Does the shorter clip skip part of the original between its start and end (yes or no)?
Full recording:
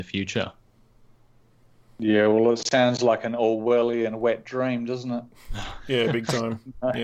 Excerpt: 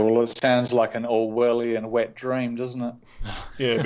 no